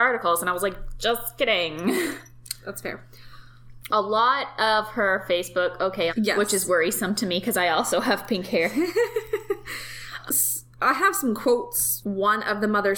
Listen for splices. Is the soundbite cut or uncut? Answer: cut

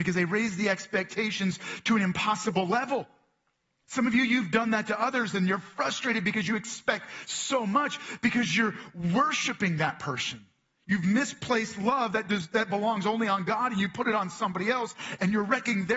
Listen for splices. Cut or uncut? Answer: uncut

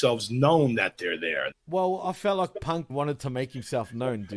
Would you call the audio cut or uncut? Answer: cut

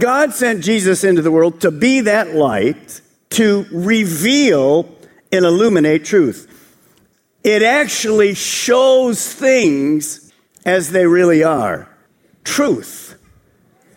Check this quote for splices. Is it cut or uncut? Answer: uncut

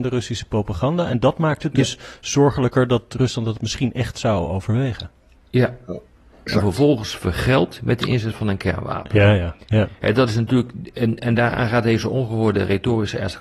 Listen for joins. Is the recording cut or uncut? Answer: cut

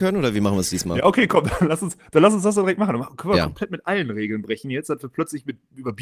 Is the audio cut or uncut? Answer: uncut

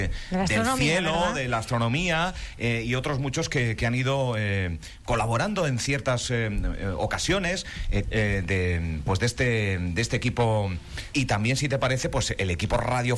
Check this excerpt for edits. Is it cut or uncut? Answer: cut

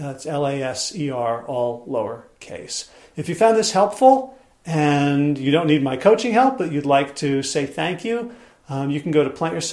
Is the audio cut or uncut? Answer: uncut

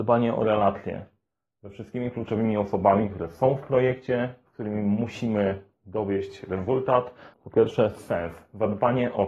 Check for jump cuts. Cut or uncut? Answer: cut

